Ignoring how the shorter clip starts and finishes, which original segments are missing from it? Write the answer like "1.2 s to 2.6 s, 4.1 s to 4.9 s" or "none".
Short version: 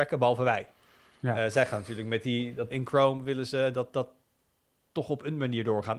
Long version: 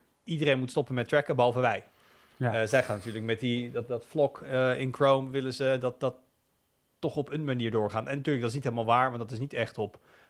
3.9 s to 4.8 s